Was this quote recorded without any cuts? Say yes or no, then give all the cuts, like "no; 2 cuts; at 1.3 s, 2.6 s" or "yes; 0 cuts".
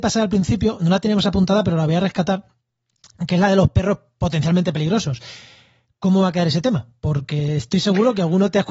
yes; 0 cuts